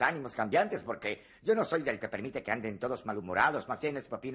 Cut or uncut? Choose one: cut